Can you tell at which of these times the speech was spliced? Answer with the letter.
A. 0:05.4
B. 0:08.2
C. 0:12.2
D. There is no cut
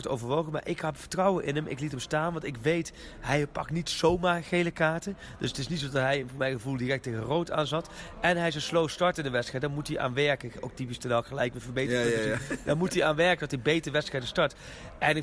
D